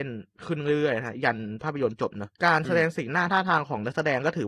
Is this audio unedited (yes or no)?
no